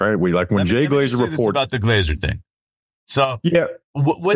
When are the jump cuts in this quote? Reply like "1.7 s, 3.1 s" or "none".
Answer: 2.9 s